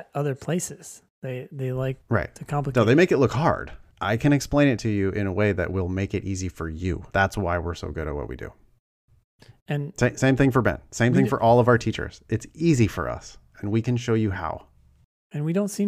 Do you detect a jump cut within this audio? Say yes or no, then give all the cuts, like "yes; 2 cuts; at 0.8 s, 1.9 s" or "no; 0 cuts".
yes; 2 cuts; at 3.9 s, 7.1 s